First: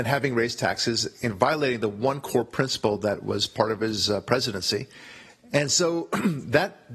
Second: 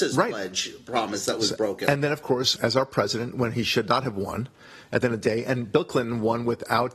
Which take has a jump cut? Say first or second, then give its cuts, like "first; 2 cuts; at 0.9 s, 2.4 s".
second; 1 cut; at 2.6 s